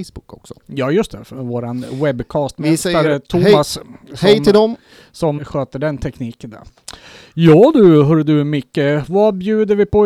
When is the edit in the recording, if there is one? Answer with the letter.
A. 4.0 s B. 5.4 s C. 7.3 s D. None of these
B